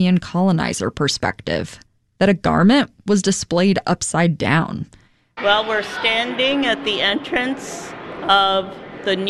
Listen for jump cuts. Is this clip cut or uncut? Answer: cut